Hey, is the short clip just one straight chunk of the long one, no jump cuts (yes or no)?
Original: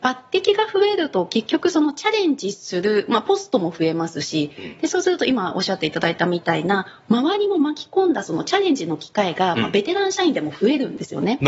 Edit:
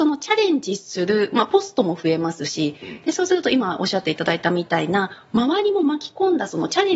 yes